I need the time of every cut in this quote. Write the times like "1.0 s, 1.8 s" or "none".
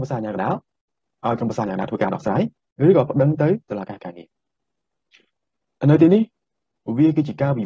none